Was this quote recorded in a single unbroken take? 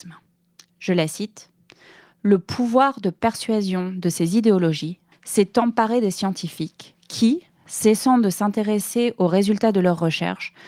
no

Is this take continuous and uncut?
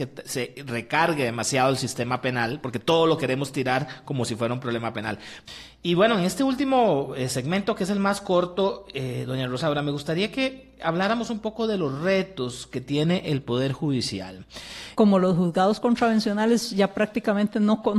no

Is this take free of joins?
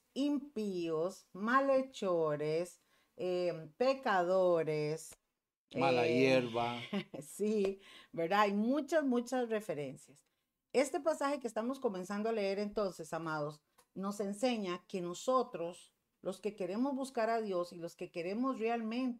yes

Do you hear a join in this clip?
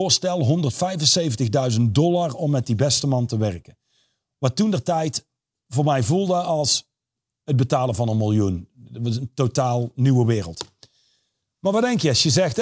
no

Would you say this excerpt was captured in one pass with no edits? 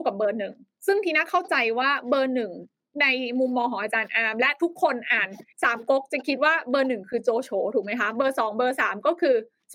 no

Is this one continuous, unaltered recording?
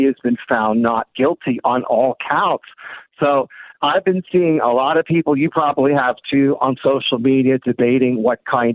yes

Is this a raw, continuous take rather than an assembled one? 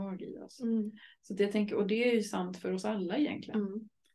yes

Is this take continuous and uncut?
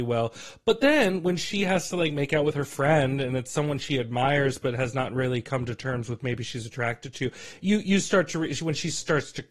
yes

